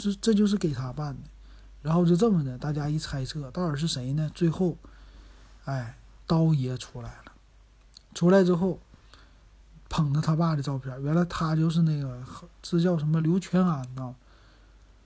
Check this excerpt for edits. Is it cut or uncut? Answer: cut